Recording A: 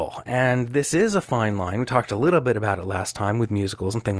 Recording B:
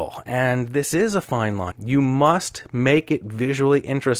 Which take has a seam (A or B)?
B